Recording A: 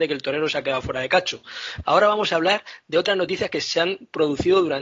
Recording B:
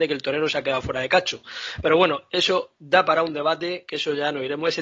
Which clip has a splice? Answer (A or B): A